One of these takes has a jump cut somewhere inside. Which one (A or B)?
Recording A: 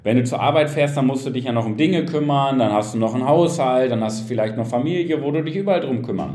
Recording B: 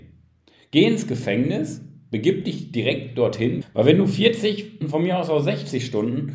B